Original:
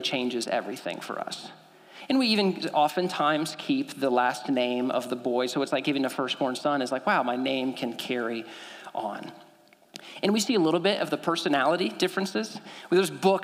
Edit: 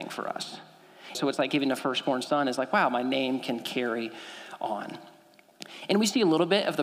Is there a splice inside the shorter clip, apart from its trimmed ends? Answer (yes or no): yes